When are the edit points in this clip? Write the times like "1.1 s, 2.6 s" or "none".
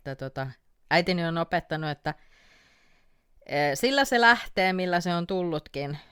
none